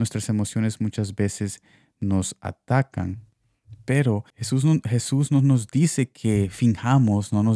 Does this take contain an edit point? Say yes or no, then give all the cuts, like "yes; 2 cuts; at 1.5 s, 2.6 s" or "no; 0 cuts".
yes; 1 cut; at 4.3 s